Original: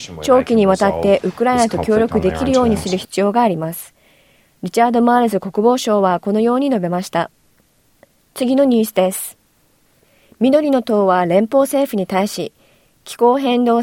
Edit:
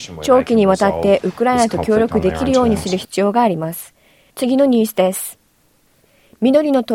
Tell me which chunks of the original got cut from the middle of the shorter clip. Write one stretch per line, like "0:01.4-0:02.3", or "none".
0:04.3-0:08.3